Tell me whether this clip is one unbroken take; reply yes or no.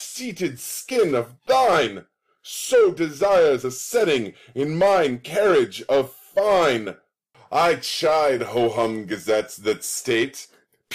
no